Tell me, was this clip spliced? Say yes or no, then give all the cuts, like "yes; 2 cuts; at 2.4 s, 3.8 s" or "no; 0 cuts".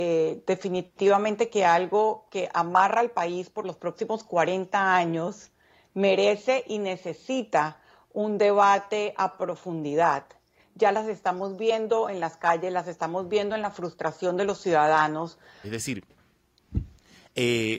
yes; 2 cuts; at 10.6 s, 15.6 s